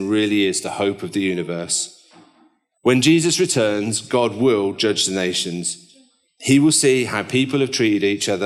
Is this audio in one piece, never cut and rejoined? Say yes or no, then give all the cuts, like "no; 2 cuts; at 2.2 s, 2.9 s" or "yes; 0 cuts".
no; 2 cuts; at 2.7 s, 6.2 s